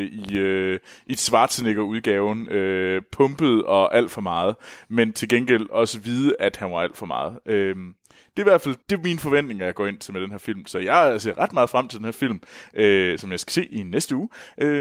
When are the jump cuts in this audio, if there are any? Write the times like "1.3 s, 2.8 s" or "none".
8.8 s